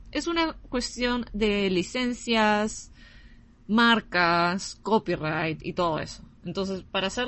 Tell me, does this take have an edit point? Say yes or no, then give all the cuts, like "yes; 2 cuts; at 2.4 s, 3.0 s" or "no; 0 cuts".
no; 0 cuts